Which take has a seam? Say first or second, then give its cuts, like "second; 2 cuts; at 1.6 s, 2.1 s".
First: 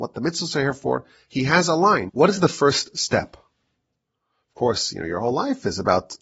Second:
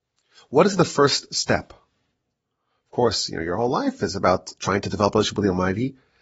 first; 1 cut; at 2.1 s